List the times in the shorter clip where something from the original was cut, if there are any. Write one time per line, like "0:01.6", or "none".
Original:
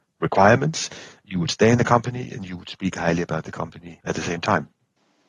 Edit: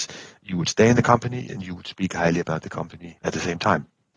none

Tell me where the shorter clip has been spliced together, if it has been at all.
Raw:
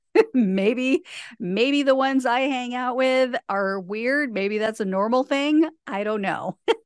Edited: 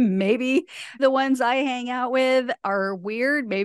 0:01.0

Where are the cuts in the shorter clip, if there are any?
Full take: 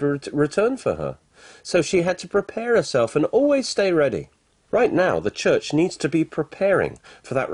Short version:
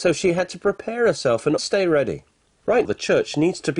0:01.6
0:02.8

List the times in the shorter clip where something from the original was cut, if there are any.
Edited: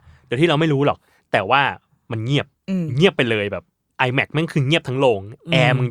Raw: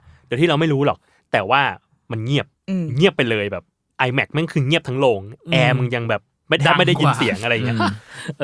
none

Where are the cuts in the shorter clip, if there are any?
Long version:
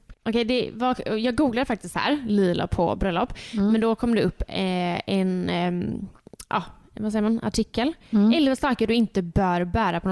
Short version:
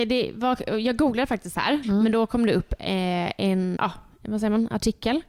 0:01.8
0:03.8

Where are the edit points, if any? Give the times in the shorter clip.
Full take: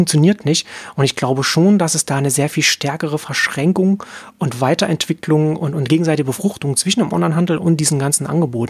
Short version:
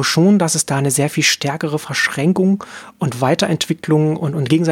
none

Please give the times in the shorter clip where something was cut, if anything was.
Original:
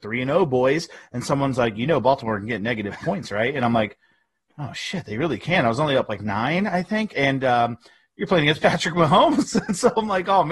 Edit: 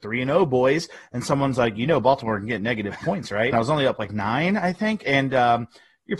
0:03.5

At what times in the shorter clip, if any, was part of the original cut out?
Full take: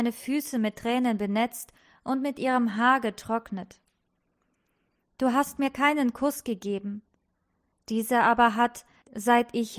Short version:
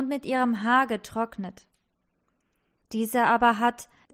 0:02.8

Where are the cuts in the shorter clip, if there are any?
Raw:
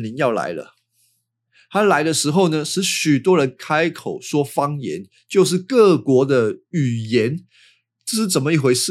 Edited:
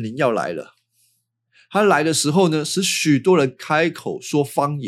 none

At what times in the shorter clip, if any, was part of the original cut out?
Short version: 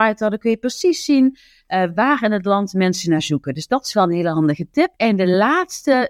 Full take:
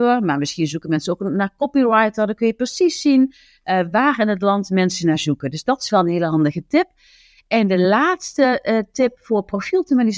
0:05.0

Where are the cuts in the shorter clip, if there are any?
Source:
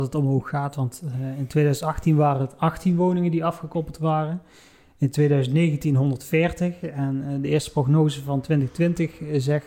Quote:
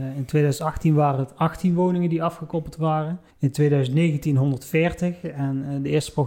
0:03.3

